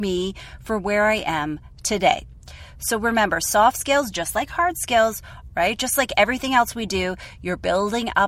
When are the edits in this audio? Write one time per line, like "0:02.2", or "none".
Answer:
0:05.5